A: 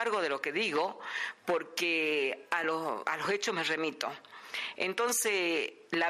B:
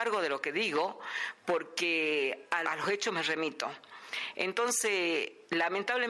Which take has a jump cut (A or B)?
B